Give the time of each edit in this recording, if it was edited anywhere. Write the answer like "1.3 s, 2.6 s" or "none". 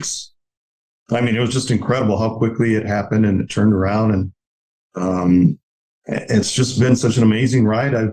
none